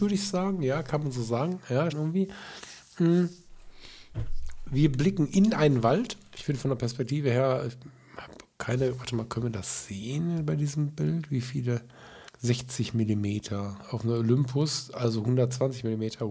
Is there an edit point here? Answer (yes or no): yes